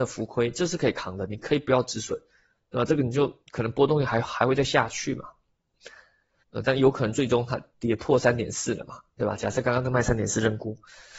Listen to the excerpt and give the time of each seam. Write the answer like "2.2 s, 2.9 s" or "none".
6.4 s